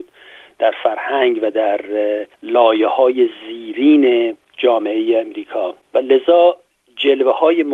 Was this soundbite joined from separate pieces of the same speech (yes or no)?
yes